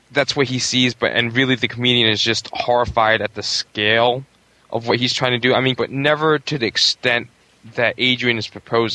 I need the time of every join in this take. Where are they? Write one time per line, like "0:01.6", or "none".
0:05.7